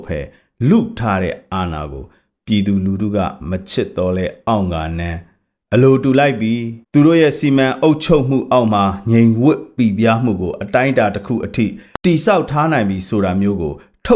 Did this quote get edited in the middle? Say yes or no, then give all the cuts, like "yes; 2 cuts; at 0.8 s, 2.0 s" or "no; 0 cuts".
yes; 1 cut; at 6.8 s